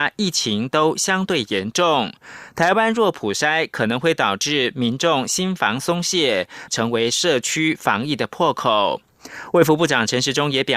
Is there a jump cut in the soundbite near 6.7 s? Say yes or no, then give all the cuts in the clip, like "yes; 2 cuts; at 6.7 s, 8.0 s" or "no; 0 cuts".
yes; 1 cut; at 6.7 s